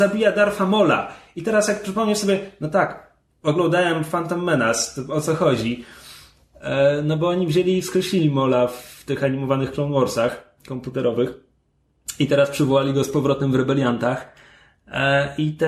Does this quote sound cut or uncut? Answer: uncut